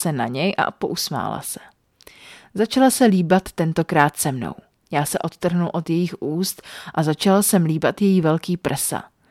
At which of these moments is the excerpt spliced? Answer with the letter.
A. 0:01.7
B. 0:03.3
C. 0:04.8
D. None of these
C